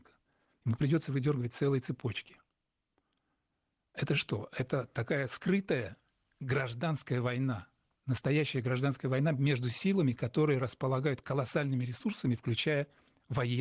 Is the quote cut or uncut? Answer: uncut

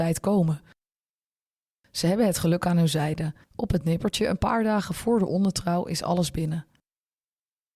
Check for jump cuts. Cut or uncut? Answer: uncut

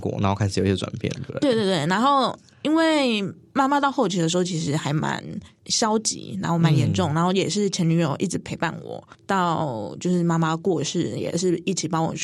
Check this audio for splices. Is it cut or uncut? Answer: uncut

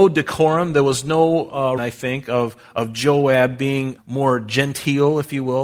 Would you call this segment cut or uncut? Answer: cut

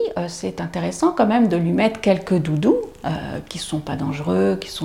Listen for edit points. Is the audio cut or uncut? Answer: uncut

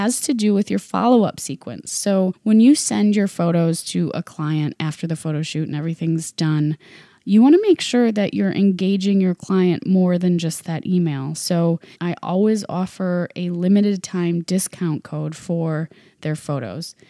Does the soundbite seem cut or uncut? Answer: cut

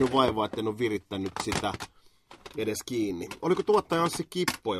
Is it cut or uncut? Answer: uncut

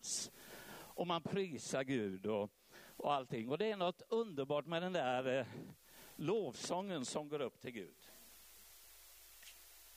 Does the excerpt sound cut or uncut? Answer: uncut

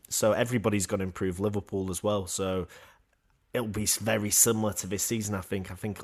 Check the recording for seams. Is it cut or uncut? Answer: uncut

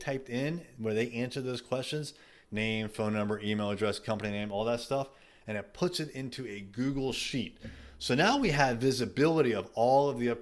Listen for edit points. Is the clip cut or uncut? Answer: uncut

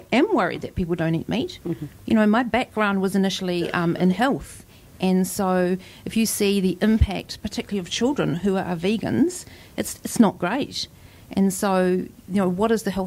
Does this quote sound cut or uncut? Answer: uncut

